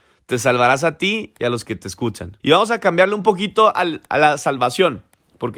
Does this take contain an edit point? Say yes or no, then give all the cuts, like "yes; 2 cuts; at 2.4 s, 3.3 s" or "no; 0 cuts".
yes; 1 cut; at 2.4 s